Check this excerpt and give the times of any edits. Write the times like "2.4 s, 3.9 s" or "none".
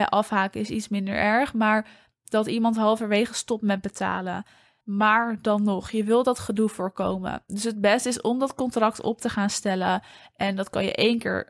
4.8 s